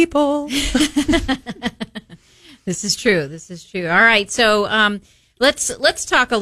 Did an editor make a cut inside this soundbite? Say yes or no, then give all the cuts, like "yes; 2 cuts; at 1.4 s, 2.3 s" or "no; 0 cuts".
no; 0 cuts